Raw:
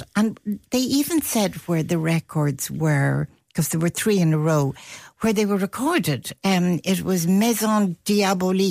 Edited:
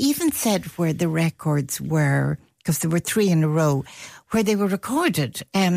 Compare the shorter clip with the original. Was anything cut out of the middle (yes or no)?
no